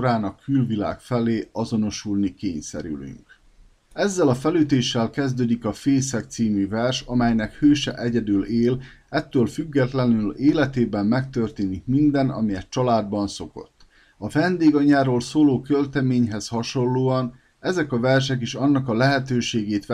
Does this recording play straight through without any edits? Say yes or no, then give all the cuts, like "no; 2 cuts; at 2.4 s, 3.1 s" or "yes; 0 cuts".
no; 2 cuts; at 3.7 s, 14.1 s